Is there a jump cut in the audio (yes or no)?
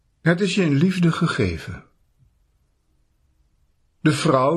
no